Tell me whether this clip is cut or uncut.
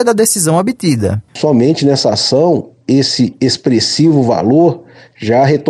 uncut